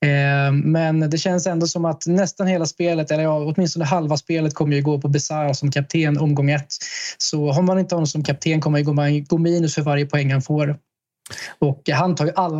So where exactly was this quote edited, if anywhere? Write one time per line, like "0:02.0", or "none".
none

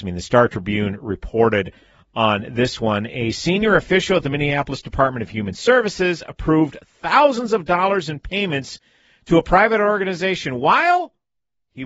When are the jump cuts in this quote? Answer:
none

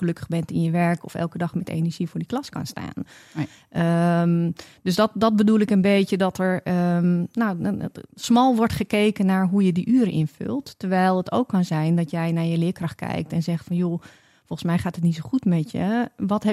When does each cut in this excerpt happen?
none

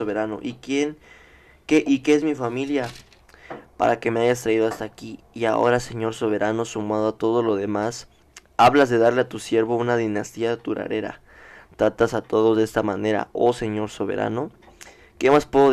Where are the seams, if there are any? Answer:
none

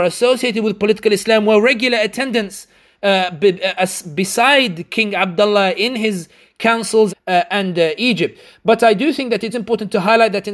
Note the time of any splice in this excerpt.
0:07.1
0:09.5

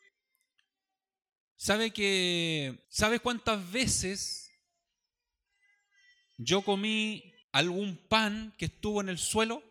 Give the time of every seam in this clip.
0:02.8
0:07.4

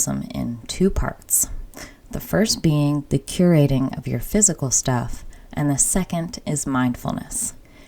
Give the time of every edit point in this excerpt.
none

